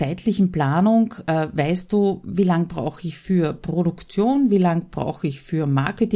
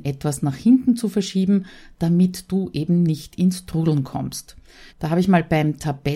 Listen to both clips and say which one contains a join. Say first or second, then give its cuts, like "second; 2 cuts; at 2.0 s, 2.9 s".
second; 1 cut; at 4.9 s